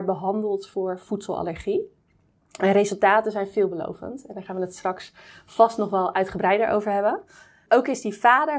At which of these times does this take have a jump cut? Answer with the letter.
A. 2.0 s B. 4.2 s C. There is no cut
C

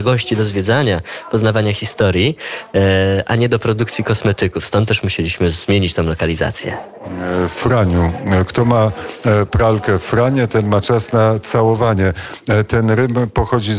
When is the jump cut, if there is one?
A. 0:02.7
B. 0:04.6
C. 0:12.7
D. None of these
D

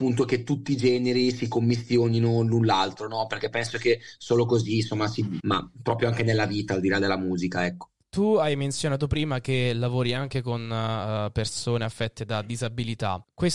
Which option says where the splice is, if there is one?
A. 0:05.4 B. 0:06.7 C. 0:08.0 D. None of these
A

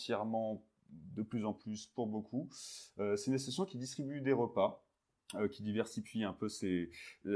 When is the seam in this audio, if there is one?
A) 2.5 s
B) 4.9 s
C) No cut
C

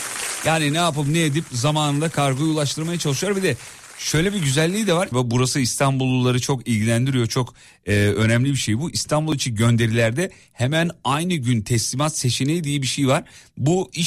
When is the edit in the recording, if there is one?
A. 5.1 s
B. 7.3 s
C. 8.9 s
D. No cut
A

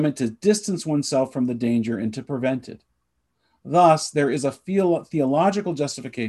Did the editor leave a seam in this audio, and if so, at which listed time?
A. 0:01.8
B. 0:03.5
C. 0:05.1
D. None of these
D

